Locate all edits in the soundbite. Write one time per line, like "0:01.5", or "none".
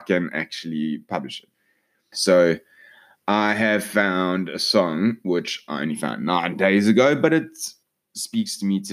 0:02.1